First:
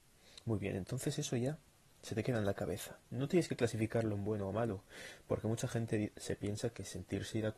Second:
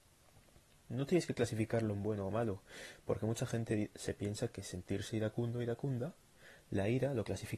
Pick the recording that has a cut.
first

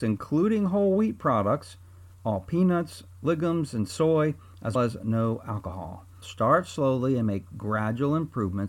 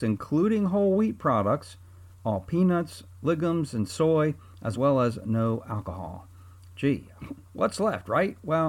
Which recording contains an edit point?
first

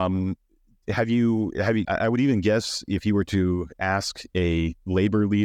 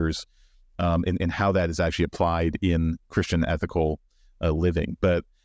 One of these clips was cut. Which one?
first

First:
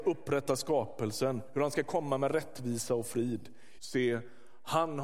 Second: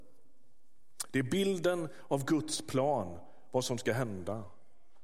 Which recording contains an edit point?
first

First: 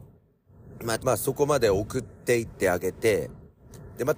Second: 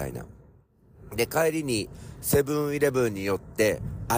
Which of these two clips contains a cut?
first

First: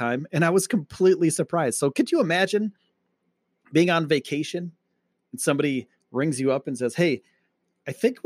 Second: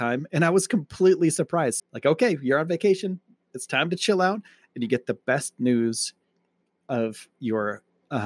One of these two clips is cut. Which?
second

